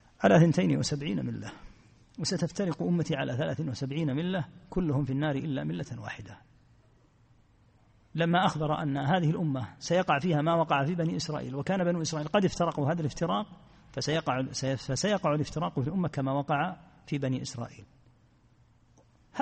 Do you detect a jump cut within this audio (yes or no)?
no